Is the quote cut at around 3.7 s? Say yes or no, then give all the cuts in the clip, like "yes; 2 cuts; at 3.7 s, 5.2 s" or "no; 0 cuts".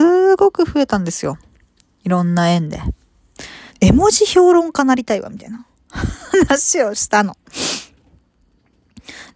yes; 1 cut; at 3.7 s